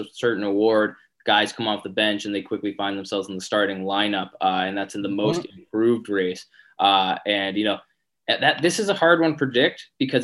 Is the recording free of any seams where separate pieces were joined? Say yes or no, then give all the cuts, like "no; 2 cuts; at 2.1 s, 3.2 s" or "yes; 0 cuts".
yes; 0 cuts